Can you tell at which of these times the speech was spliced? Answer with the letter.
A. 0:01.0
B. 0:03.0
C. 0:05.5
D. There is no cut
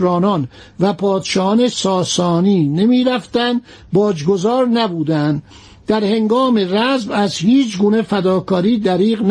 D